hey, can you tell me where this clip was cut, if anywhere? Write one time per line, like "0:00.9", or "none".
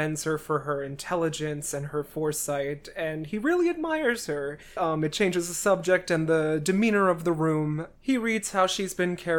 0:04.8
0:08.0